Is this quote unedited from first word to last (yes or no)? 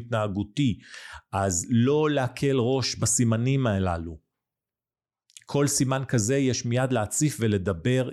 yes